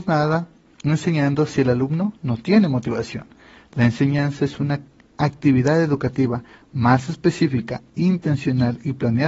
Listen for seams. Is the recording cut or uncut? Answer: uncut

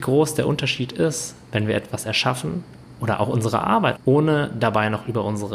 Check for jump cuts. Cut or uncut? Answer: cut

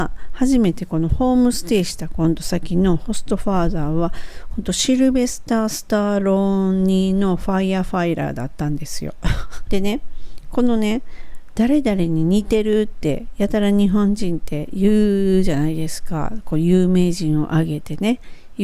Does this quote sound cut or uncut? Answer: cut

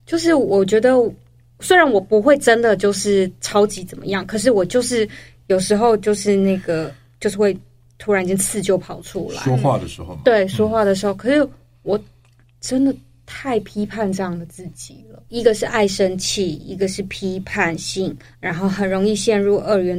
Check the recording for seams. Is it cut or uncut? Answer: cut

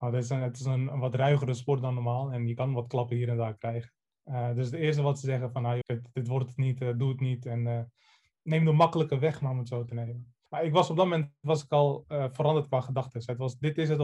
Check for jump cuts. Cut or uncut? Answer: cut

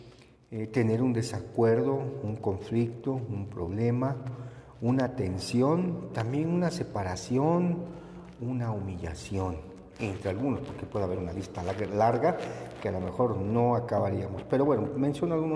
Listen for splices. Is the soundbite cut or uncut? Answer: uncut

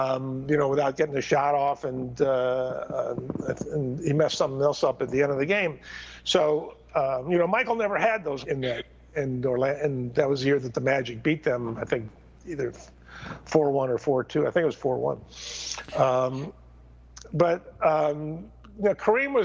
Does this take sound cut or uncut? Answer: cut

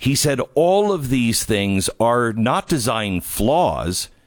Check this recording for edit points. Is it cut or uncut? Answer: uncut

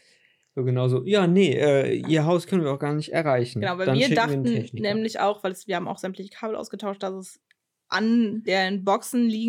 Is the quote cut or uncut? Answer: uncut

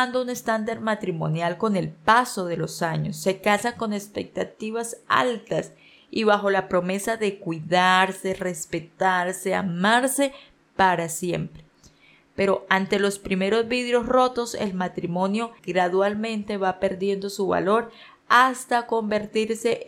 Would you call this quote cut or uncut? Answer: cut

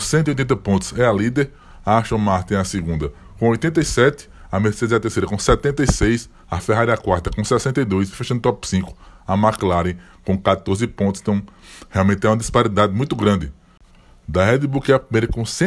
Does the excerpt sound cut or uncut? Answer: uncut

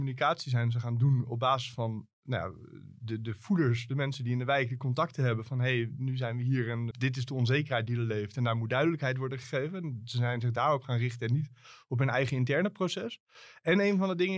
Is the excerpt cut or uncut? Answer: cut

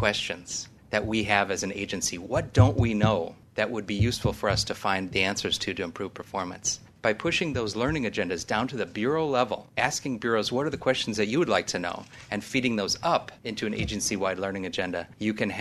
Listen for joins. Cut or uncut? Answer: uncut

